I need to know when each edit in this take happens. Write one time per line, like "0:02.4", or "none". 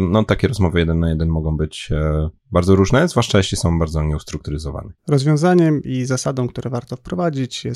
0:05.0